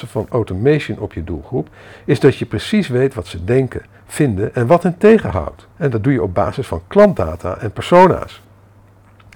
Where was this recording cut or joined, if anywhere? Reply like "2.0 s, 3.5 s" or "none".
5.7 s